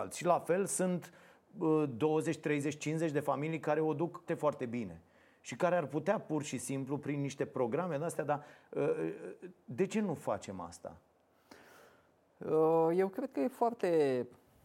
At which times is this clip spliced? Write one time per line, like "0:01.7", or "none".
0:04.3